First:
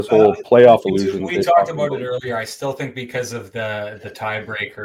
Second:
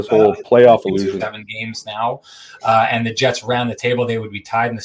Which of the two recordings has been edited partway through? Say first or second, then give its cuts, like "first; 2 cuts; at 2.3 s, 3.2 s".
second; 1 cut; at 1.2 s